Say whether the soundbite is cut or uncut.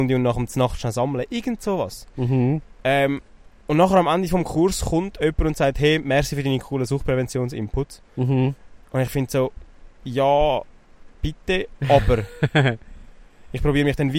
uncut